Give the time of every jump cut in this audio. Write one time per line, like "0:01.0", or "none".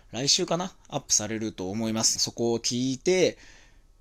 0:02.2